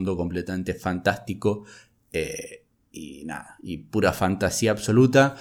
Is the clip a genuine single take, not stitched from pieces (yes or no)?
yes